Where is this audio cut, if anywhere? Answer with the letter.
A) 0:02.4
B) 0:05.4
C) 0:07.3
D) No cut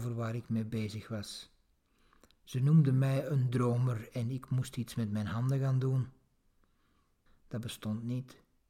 C